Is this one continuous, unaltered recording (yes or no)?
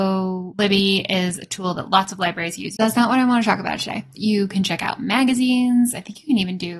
no